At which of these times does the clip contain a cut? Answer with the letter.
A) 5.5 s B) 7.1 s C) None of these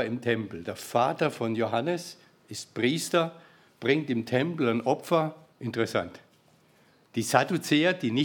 A